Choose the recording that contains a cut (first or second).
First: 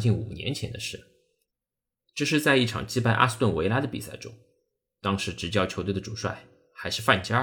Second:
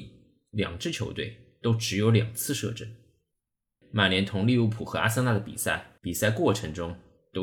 second